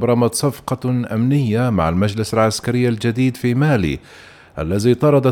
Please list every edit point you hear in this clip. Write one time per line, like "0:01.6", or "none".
none

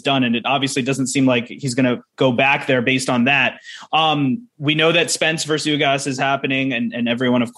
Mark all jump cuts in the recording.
none

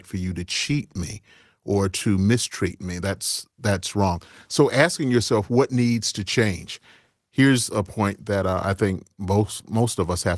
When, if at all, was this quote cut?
none

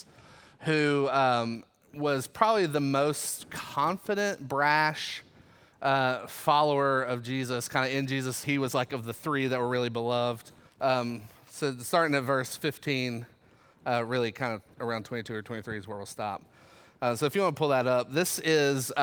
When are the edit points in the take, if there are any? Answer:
0:08.4
0:10.7

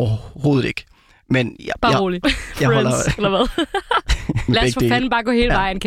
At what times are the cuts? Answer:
0:02.2
0:04.5

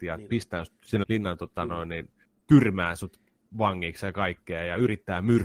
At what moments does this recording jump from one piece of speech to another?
0:01.0

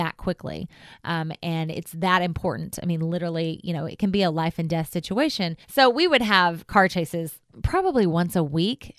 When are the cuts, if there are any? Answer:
0:05.6

